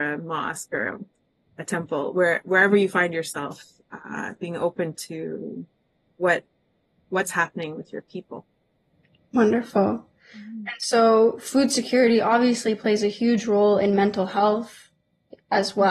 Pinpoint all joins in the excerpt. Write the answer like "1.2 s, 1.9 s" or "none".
none